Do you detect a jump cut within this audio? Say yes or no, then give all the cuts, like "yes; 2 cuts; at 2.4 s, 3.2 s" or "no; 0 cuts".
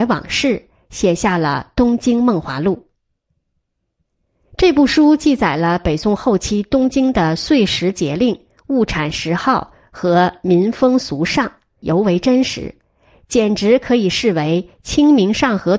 yes; 1 cut; at 11.8 s